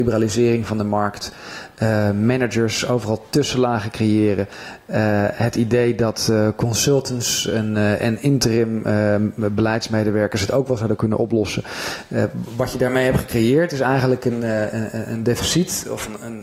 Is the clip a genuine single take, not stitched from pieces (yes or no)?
yes